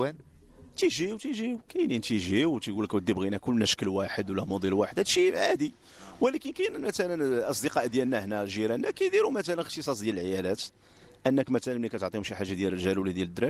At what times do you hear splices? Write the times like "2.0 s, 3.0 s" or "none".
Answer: 1.7 s